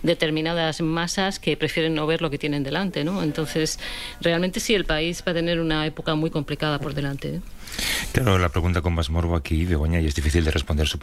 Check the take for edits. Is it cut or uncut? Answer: uncut